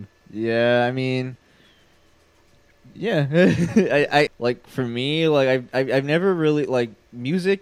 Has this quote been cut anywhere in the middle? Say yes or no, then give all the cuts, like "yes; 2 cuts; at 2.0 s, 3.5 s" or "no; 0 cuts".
yes; 1 cut; at 4.3 s